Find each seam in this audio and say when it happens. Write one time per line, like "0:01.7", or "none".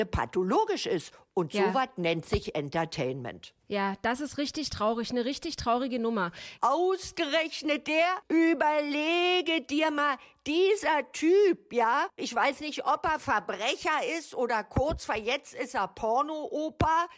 0:06.6
0:12.2